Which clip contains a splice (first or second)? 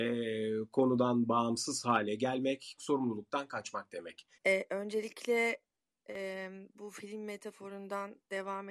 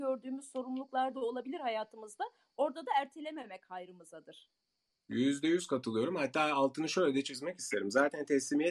first